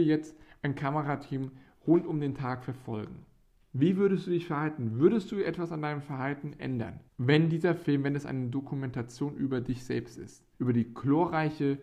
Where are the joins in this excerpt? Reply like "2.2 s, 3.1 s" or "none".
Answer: 7.1 s, 10.5 s